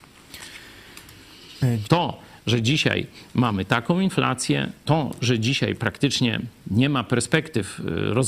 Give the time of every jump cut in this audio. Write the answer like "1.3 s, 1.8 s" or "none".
1.8 s